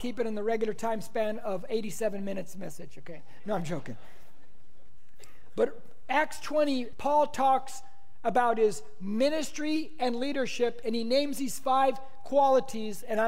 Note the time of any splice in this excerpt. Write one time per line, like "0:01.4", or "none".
0:06.9